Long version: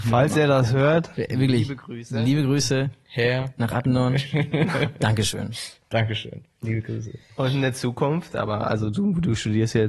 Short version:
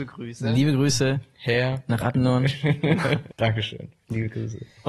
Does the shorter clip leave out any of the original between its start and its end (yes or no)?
yes